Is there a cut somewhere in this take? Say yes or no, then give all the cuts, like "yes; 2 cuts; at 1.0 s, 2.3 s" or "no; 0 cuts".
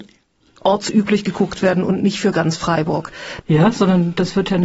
yes; 1 cut; at 3.4 s